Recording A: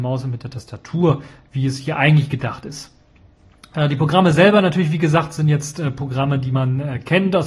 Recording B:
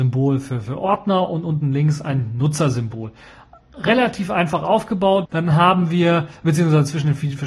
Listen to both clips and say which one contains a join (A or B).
B